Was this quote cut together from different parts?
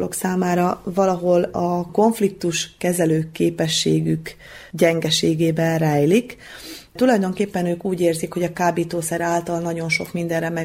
no; 0 cuts

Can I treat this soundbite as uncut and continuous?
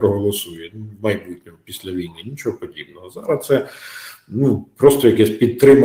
yes; 0 cuts

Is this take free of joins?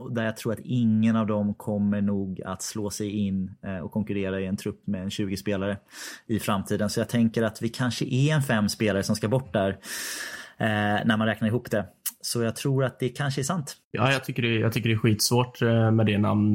no; 1 cut; at 13.8 s

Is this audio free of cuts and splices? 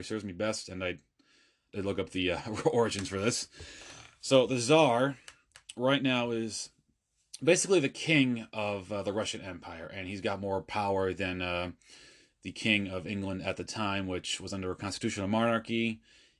yes; 0 cuts

